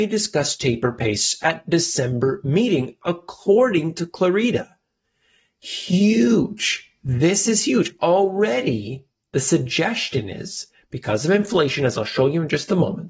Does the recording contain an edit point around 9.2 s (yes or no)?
no